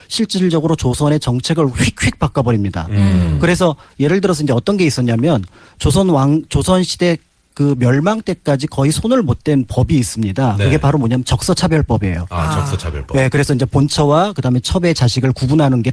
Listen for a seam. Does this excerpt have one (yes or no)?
no